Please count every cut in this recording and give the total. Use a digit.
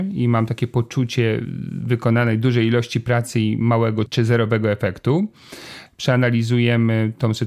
2